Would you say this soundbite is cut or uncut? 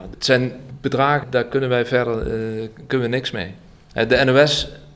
cut